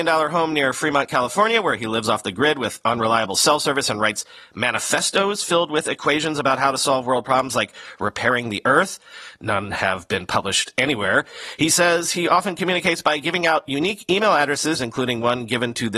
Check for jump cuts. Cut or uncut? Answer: cut